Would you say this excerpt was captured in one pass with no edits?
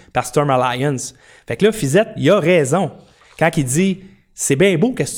yes; 0 cuts

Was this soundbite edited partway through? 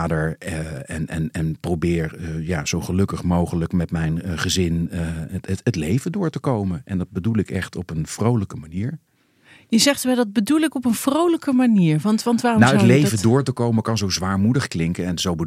no; 0 cuts

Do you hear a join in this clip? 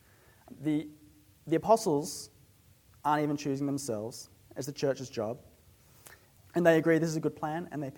yes; 1 cut; at 6.4 s

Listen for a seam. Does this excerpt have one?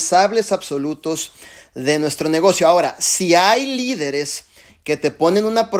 no; 0 cuts

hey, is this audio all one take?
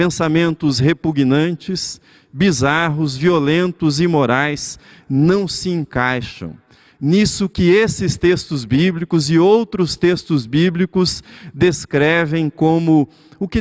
yes; 0 cuts

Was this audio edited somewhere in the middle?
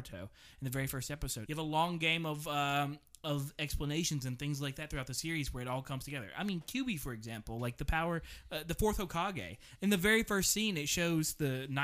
yes; 1 cut; at 1.5 s

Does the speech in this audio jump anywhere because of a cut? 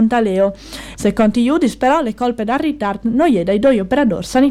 yes; 1 cut; at 1.0 s

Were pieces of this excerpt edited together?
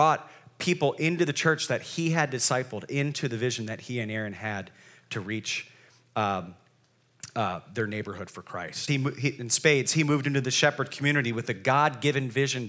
yes; 1 cut; at 8.9 s

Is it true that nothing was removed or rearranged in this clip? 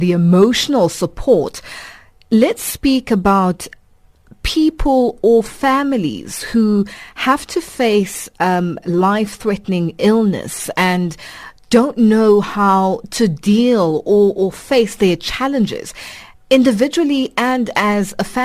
yes; 0 cuts

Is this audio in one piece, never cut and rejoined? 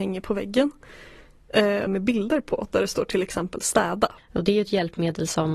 no; 2 cuts; at 1.9 s, 4.2 s

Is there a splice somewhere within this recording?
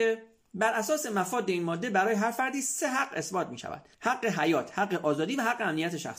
yes; 1 cut; at 3.9 s

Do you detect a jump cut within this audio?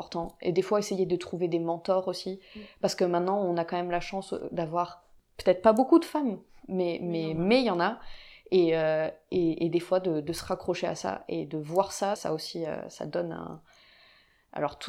yes; 1 cut; at 12.2 s

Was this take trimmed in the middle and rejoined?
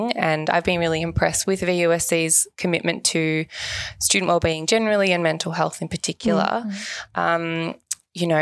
no; 0 cuts

